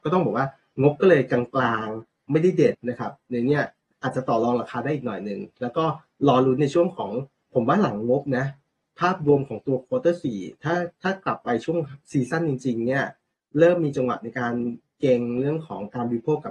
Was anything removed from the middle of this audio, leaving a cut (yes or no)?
yes